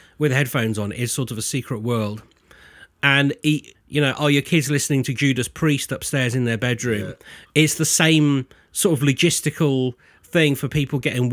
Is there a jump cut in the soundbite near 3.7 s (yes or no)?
yes